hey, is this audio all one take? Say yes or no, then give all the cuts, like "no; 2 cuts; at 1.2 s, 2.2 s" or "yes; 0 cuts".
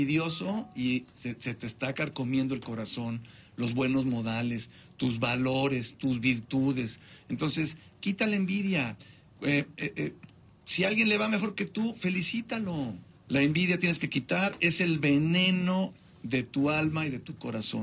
no; 1 cut; at 13.1 s